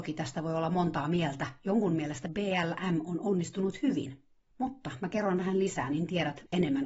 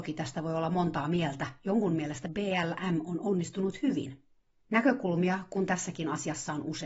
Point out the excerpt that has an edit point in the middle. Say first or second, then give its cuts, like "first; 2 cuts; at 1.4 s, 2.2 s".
first; 1 cut; at 4.5 s